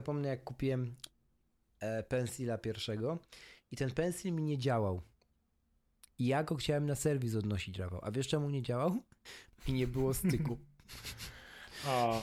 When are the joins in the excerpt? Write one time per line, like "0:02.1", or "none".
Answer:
0:09.5

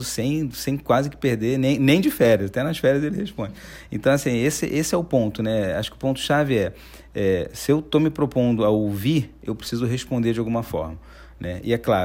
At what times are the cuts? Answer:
none

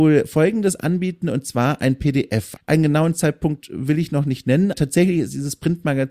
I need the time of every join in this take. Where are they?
0:02.6
0:04.7

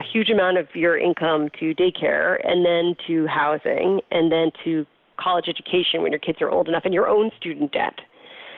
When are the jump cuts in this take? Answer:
0:05.1

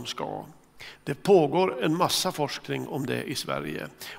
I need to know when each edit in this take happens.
0:00.9

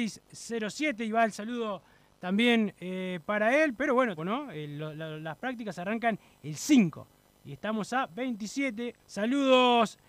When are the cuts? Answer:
0:04.2
0:09.0

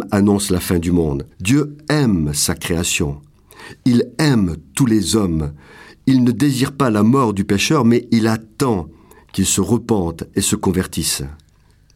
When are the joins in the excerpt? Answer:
0:01.3

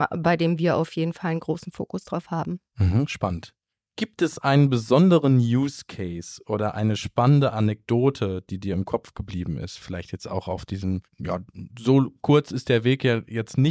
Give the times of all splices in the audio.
none

